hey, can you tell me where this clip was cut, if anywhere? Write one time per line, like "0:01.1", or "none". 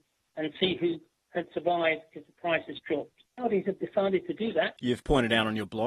0:03.3
0:04.8